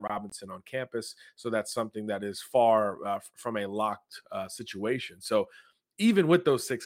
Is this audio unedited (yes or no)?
yes